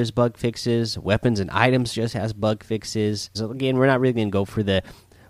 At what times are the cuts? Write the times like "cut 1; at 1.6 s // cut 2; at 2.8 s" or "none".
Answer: cut 1; at 3.3 s